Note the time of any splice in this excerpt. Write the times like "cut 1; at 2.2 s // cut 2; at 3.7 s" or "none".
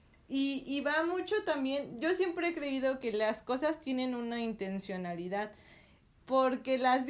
none